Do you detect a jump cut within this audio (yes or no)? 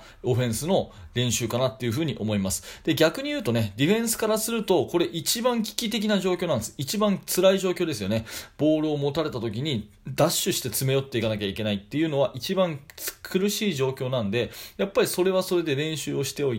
no